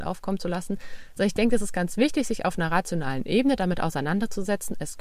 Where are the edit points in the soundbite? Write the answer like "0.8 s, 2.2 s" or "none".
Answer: none